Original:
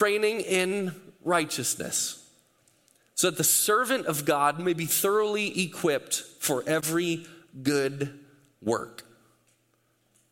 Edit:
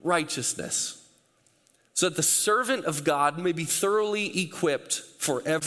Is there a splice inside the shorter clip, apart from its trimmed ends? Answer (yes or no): no